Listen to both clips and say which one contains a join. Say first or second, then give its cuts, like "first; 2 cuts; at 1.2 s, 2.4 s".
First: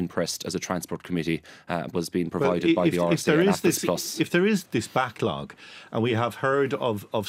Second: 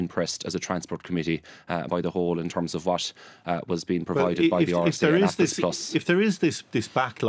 first; 2 cuts; at 1.9 s, 4.6 s